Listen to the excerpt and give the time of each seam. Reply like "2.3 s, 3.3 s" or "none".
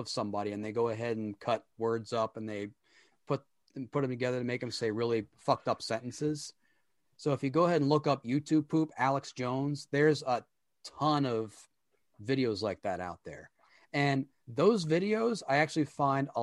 none